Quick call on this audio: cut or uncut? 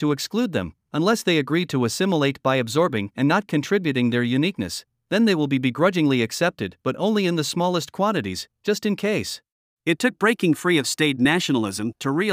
cut